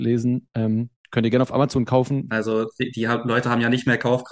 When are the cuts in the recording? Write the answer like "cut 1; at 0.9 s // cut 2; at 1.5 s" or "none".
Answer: cut 1; at 2.3 s